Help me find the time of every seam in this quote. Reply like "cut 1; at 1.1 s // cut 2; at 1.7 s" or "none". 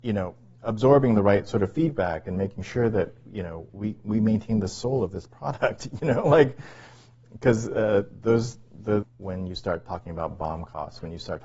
cut 1; at 3.7 s // cut 2; at 9.0 s